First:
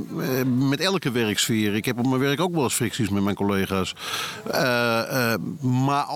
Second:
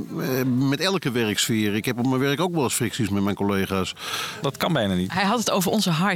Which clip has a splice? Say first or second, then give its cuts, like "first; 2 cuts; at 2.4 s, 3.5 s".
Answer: second; 1 cut; at 4.4 s